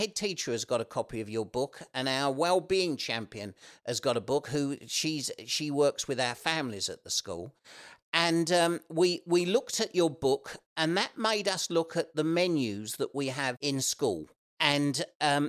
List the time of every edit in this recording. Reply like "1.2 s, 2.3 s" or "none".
14.5 s